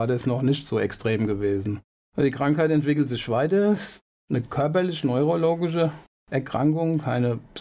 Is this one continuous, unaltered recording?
yes; 0 cuts

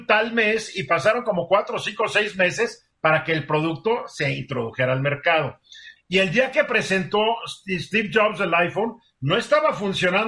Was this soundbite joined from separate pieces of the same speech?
yes; 1 cut; at 6.0 s

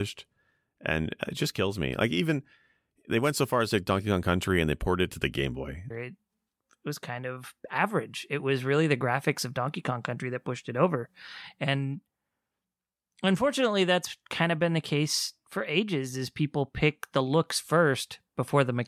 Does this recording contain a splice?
yes; 1 cut; at 5.9 s

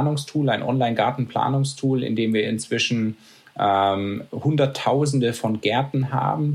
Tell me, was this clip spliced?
no; 0 cuts

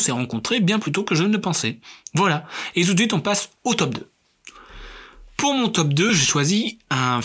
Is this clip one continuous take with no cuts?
yes; 0 cuts

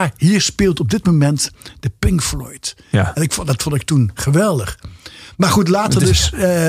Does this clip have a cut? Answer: no; 0 cuts

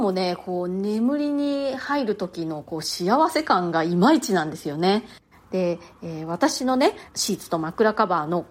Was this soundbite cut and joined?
yes; 2 cuts; at 5.3 s, 7.1 s

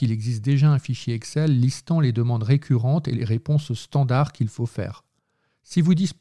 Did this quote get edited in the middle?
no; 0 cuts

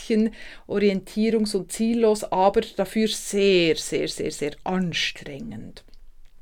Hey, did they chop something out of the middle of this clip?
no; 0 cuts

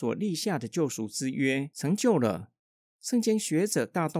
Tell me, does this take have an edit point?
no; 0 cuts

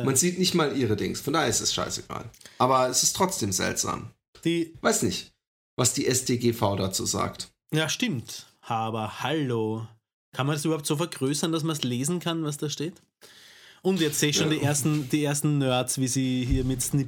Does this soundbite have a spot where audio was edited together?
no; 0 cuts

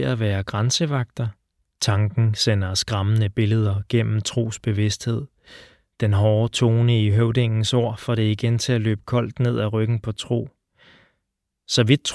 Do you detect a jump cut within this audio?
yes; 2 cuts; at 1.8 s, 5.9 s

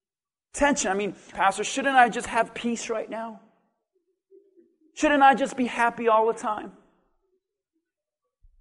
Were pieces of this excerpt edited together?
yes; 1 cut; at 1.3 s

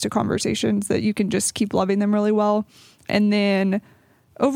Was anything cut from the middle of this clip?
no; 0 cuts

